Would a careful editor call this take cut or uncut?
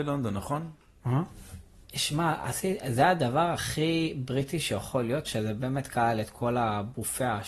cut